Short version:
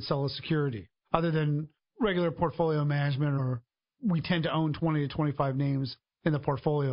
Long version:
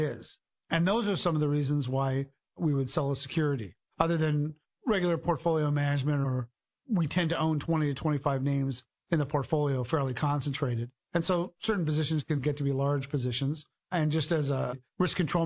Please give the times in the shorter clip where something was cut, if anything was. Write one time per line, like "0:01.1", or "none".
none